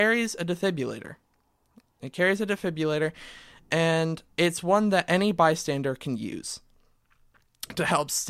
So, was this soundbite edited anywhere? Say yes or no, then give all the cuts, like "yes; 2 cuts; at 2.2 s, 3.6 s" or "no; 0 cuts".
yes; 1 cut; at 4.3 s